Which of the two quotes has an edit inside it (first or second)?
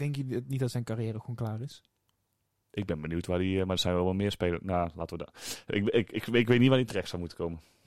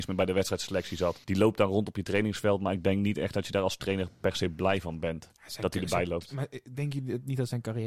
second